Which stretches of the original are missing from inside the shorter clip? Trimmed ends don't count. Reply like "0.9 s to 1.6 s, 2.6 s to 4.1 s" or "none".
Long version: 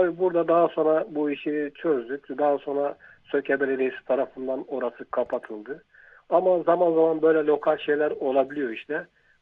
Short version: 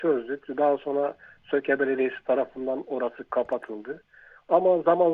none

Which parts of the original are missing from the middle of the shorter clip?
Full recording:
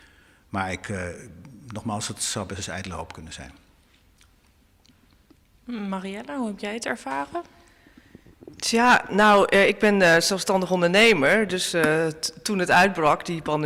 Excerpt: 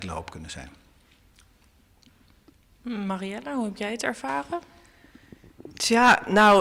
none

